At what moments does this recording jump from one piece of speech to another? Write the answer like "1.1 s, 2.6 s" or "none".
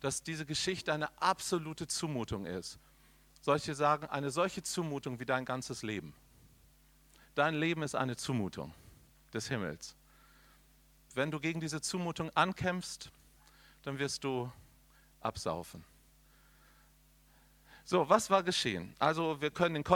11.1 s